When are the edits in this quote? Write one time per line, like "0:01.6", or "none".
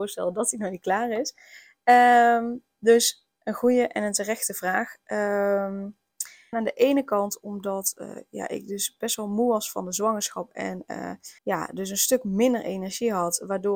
0:06.5
0:11.4

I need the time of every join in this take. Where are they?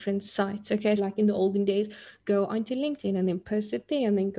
0:01.0

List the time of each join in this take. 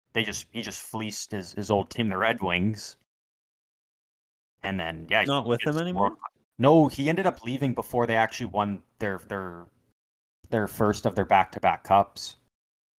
0:05.3

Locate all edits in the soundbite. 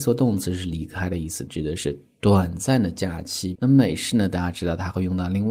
0:01.5
0:03.5

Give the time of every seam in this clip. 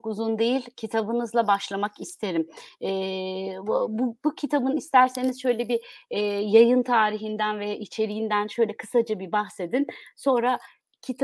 none

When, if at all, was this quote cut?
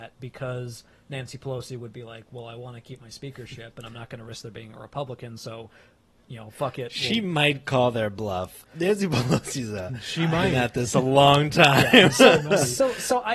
none

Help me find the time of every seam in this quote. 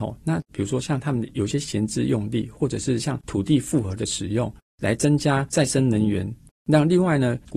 none

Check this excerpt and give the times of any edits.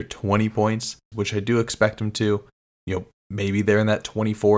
0:01.1

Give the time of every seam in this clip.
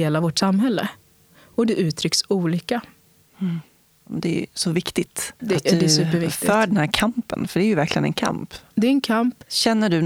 none

